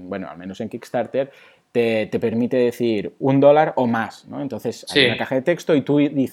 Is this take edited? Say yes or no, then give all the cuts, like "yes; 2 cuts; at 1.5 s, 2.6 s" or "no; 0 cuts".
no; 0 cuts